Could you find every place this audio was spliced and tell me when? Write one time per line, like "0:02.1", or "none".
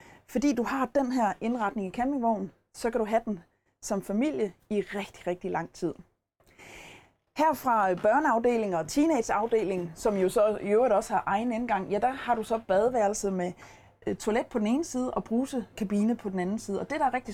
none